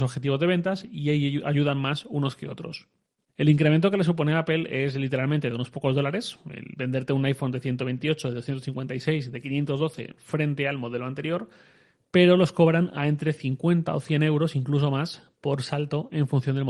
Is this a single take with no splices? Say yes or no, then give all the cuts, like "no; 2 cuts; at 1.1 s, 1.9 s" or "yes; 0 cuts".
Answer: no; 1 cut; at 3.3 s